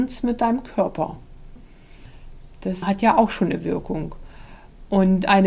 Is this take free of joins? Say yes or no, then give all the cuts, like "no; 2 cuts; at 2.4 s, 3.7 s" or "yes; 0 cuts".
yes; 0 cuts